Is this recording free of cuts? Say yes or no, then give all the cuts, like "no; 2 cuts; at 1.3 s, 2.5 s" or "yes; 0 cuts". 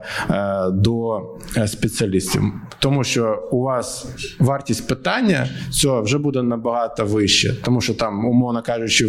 yes; 0 cuts